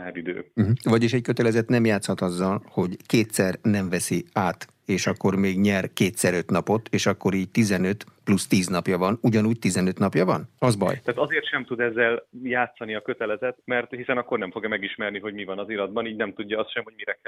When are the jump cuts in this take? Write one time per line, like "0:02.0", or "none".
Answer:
0:10.6